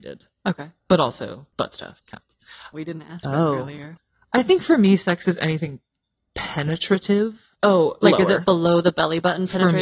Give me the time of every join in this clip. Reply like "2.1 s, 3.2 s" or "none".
2.7 s, 7.5 s